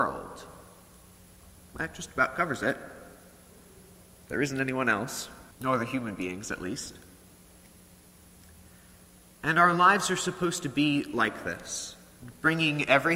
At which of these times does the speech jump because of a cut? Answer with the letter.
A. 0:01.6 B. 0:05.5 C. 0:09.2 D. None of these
B